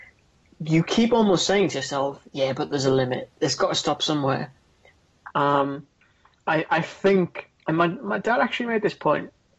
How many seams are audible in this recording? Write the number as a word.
two